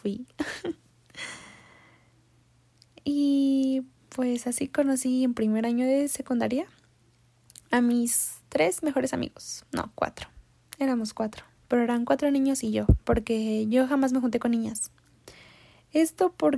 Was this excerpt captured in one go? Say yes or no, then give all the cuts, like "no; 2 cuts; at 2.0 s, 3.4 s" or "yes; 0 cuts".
no; 1 cut; at 11.5 s